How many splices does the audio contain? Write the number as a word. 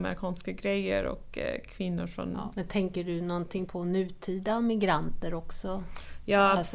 two